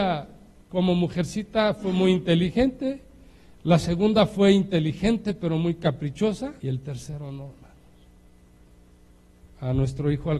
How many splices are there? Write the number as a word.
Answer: one